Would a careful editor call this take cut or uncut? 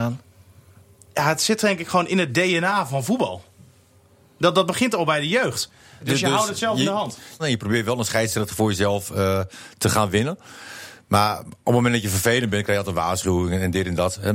cut